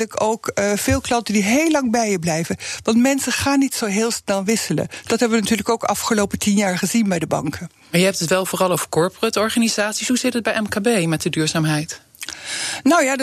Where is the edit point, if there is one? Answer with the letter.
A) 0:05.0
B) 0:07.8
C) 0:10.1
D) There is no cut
D